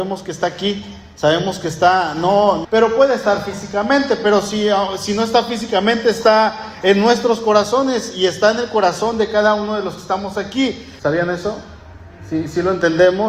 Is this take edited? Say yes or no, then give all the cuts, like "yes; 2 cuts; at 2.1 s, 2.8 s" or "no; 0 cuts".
yes; 2 cuts; at 2.6 s, 11.0 s